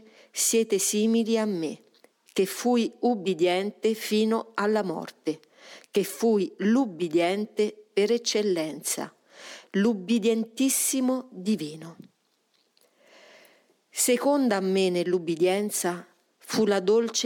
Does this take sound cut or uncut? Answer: uncut